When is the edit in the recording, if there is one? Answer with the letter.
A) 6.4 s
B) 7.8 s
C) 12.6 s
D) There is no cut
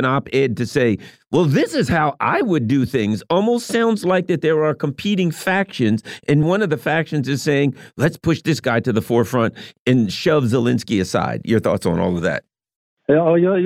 A